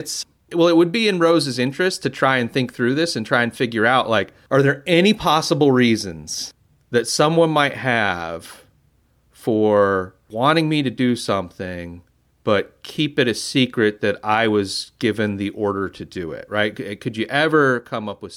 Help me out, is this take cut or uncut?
uncut